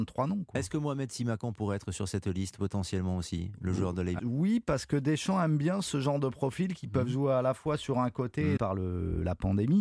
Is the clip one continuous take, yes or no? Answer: no